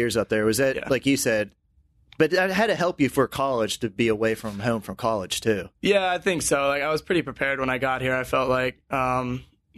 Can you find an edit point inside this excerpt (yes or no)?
no